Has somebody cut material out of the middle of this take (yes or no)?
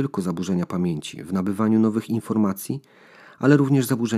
no